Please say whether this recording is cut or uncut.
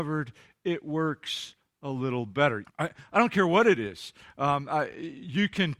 cut